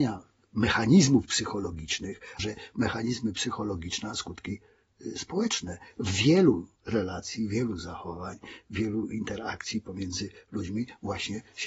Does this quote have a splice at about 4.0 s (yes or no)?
no